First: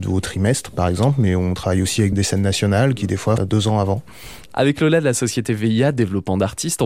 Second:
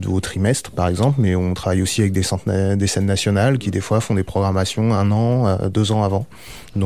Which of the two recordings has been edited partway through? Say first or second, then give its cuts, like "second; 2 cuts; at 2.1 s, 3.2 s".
first; 3 cuts; at 2.1 s, 3.4 s, 4.5 s